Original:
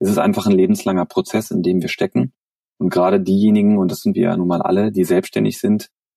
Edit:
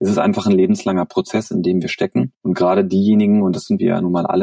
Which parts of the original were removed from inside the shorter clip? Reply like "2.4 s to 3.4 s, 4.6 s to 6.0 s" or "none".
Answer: 2.4 s to 2.7 s